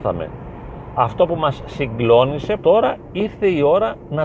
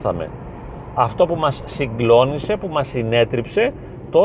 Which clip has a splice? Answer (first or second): first